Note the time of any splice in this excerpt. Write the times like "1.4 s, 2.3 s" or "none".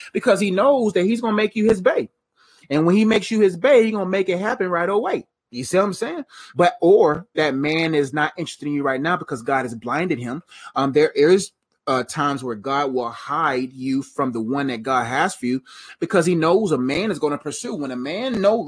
6.5 s

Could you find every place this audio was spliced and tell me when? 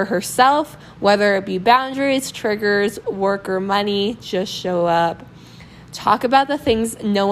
3.0 s

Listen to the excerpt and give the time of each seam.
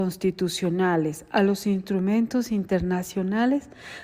none

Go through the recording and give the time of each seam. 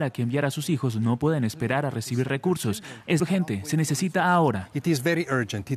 3.2 s

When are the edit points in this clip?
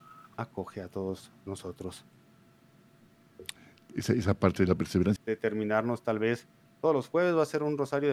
5.2 s

